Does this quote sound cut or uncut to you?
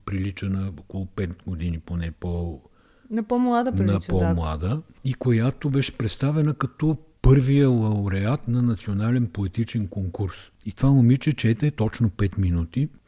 uncut